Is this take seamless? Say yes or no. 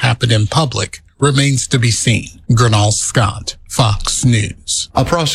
no